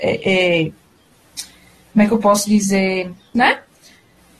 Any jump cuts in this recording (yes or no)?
yes